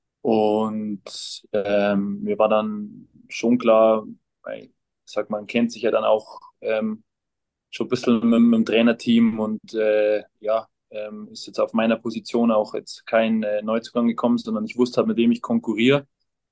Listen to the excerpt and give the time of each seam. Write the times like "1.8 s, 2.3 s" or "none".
none